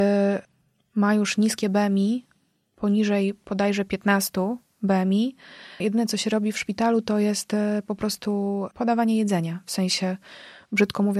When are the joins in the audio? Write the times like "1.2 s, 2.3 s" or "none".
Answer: 5.8 s